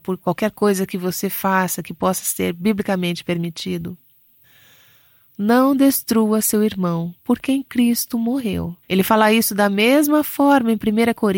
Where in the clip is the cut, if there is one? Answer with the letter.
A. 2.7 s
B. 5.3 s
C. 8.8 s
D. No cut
C